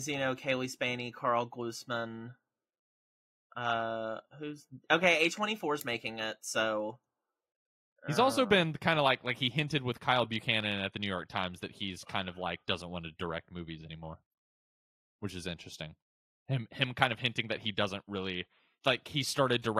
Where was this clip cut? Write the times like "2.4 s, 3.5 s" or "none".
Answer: none